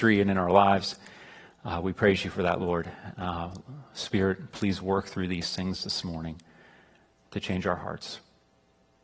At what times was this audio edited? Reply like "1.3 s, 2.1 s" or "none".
none